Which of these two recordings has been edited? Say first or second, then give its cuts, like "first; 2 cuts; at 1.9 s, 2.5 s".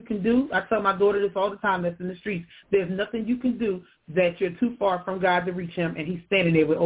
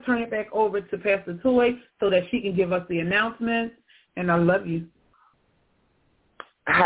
second; 1 cut; at 4.1 s